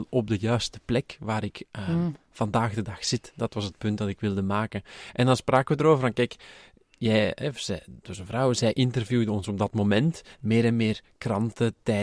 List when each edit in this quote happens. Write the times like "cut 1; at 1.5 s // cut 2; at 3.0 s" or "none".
none